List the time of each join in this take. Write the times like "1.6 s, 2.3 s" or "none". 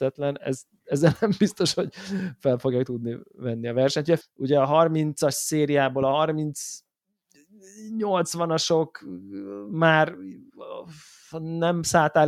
4.2 s